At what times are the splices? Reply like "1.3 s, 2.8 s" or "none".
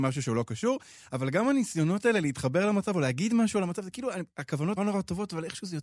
4.8 s